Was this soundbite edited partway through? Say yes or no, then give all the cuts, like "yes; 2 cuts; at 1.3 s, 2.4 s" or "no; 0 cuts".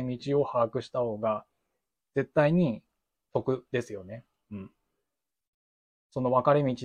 no; 0 cuts